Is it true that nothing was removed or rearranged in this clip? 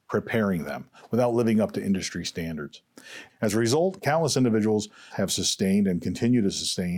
no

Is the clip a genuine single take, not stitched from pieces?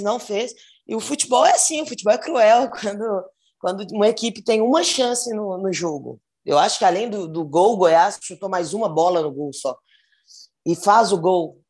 yes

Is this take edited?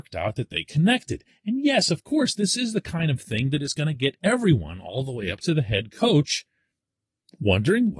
no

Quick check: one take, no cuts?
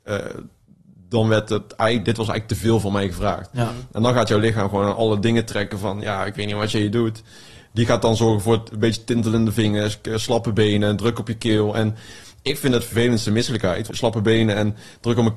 no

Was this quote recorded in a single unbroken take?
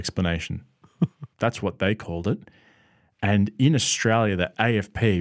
no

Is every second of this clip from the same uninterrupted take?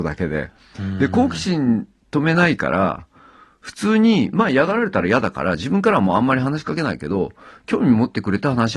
yes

